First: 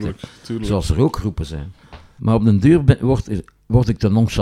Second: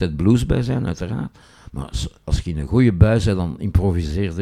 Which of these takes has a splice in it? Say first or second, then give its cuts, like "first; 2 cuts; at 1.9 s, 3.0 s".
first; 1 cut; at 2.2 s